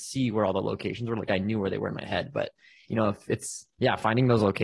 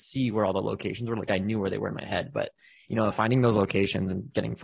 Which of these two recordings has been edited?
second; 1 cut; at 3.1 s

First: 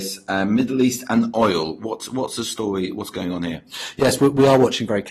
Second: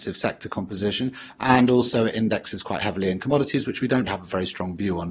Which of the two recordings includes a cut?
second; 1 cut; at 4.1 s

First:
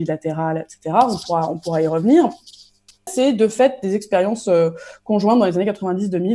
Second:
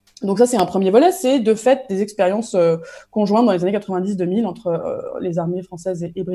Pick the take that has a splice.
first; 1 cut; at 3.1 s

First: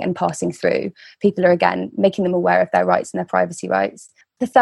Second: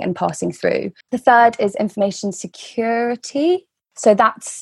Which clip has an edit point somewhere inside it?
second; 1 cut; at 1.0 s

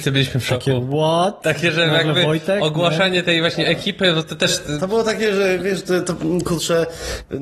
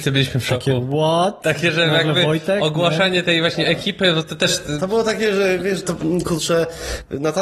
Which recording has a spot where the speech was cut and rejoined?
second; 1 cut; at 5.8 s

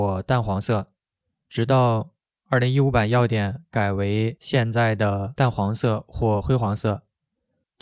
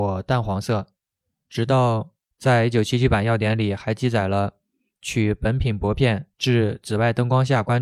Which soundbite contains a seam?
second; 2 cuts; at 2.2 s, 6.3 s

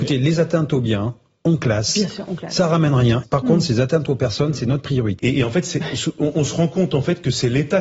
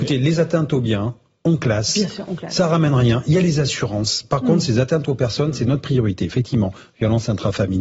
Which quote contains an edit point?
first; 2 cuts; at 3.2 s, 5.2 s

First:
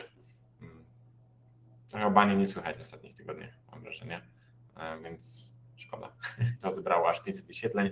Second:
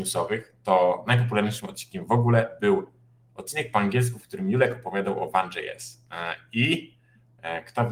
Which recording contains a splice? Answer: first; 1 cut; at 6.5 s

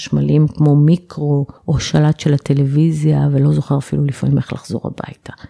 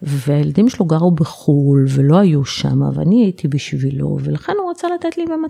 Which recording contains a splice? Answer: first; 1 cut; at 1.6 s

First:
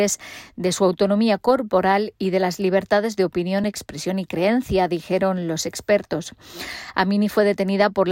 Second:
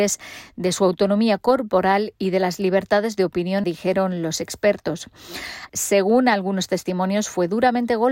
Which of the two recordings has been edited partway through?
second; 2 cuts; at 3.6 s, 5.7 s

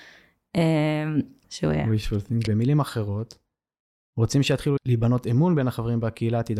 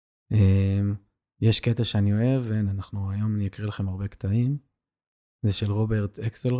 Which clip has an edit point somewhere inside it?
first; 3 cuts; at 1.4 s, 2.5 s, 4.8 s

